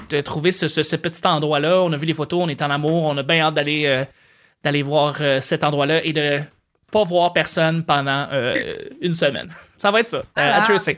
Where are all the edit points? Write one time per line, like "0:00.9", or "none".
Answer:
0:09.7